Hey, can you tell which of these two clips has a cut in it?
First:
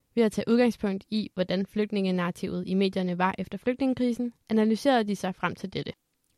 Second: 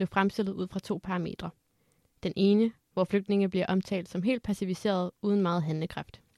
first; 1 cut; at 4.4 s

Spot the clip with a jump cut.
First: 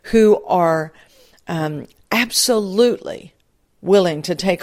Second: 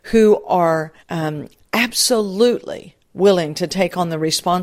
second; 2 cuts; at 1.0 s, 3.0 s

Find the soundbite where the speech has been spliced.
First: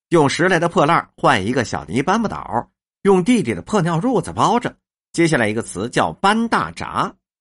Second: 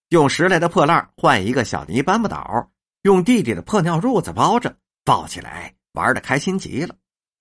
first; 1 cut; at 5.0 s

